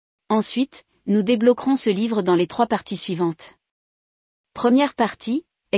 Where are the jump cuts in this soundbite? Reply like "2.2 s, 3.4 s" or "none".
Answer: none